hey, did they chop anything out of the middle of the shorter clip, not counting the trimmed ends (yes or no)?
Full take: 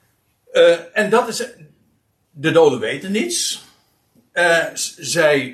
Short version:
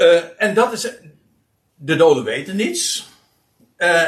no